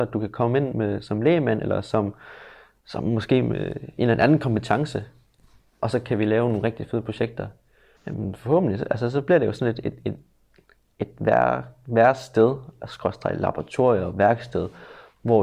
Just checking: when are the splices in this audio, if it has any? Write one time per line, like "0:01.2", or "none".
0:08.0